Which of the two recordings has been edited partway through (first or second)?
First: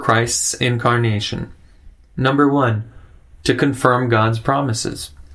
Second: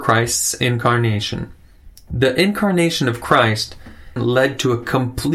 second